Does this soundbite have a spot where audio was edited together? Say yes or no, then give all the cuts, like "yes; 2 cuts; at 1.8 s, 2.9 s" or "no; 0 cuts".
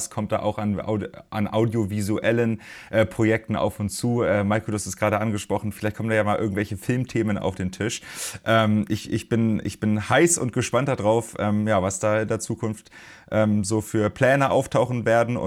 no; 0 cuts